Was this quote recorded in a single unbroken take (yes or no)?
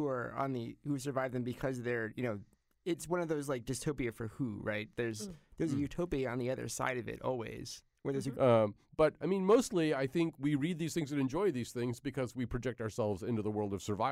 no